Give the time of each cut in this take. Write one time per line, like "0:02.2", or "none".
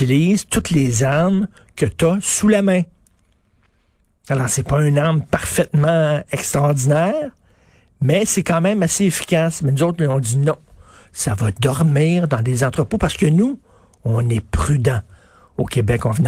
none

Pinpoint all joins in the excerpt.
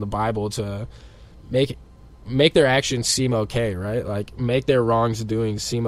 none

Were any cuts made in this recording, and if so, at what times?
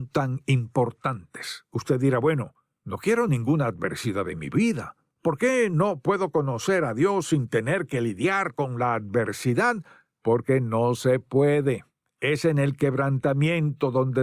none

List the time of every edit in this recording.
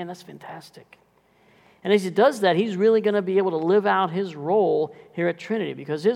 none

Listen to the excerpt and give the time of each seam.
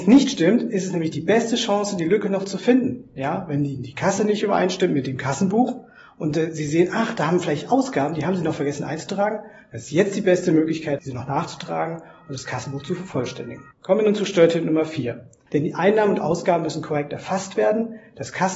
0:13.7
0:15.5

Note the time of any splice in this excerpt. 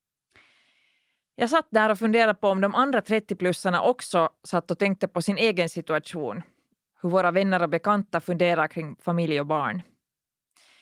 0:06.9

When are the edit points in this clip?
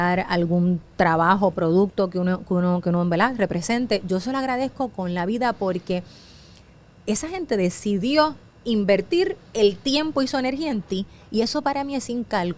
0:01.5

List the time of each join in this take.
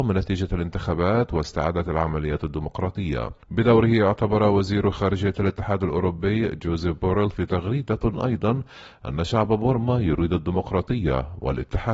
0:03.4

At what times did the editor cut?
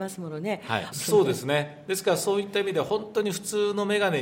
0:00.9

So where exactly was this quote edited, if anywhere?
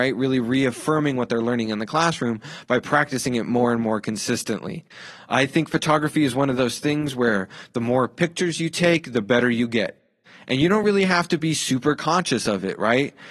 none

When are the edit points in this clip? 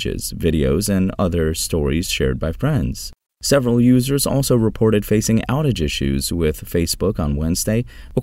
0:03.3

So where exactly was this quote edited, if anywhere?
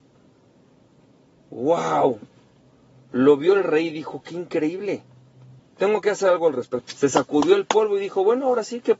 0:05.6
0:06.8

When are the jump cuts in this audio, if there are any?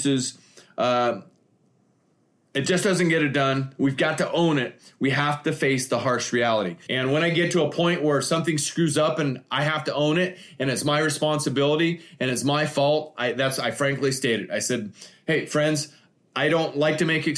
0:06.9

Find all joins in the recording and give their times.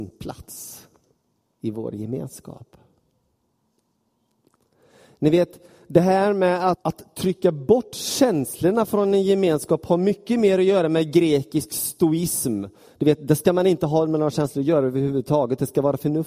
0:06.7

